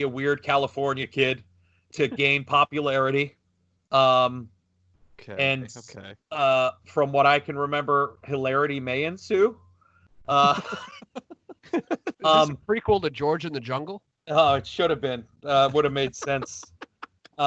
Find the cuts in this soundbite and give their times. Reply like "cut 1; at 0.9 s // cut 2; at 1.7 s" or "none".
cut 1; at 6.2 s // cut 2; at 12.1 s